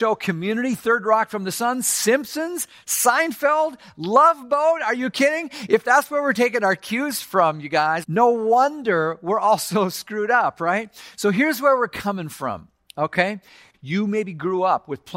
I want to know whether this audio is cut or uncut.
cut